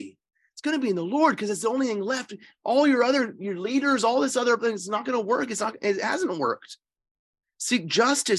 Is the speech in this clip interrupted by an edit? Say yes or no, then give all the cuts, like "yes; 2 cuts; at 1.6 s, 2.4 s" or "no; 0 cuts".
no; 0 cuts